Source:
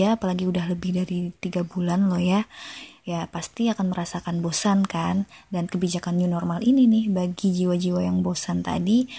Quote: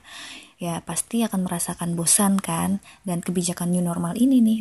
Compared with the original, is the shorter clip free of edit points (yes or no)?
yes